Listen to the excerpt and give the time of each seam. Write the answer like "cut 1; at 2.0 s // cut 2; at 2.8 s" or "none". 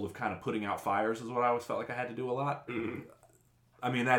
cut 1; at 2.7 s